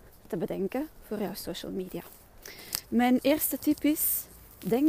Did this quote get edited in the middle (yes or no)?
yes